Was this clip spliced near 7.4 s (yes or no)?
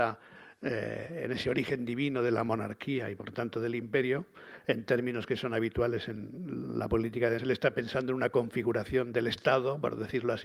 yes